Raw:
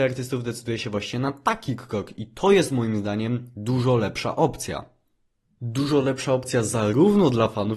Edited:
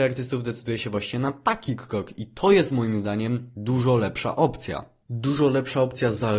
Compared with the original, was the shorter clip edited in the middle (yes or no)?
yes